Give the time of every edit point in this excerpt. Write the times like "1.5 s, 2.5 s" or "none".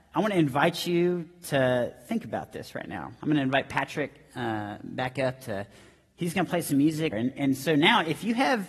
7.1 s